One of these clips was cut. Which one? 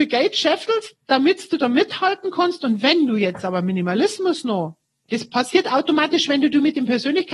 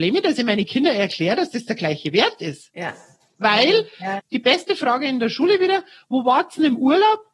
second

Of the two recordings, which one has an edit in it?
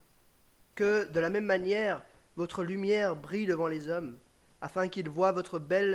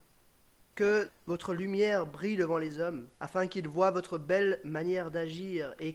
second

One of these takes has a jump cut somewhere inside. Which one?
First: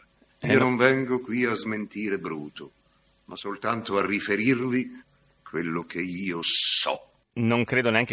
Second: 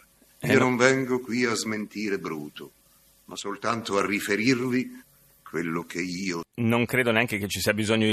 second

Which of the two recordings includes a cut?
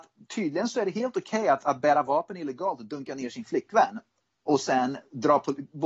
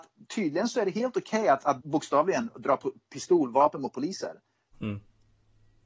second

